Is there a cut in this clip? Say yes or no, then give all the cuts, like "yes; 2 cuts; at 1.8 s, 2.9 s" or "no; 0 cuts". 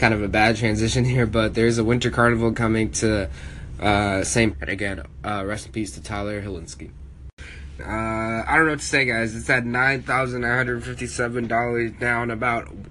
yes; 2 cuts; at 4.5 s, 7.8 s